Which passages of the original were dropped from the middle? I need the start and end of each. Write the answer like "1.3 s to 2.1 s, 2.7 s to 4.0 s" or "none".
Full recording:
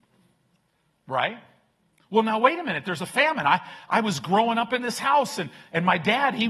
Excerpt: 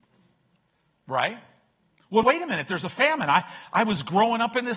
2.2 s to 2.4 s